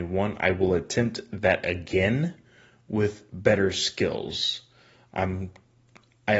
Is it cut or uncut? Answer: uncut